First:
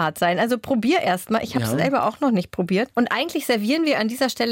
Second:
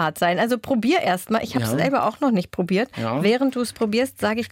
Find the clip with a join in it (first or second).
first